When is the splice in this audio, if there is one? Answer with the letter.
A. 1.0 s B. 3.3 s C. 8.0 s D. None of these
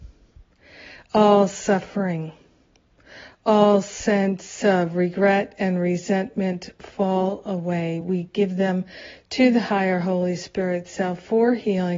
D